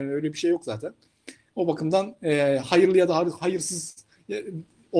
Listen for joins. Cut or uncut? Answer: uncut